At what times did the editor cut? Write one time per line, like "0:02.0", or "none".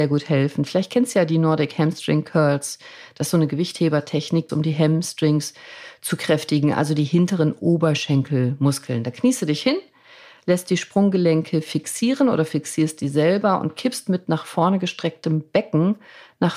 0:04.5